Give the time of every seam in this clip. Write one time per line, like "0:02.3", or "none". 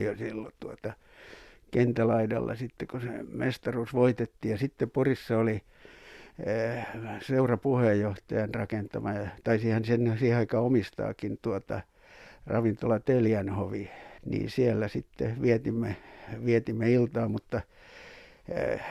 none